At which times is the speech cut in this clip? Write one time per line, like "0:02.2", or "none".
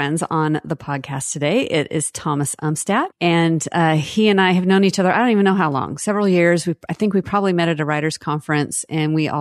none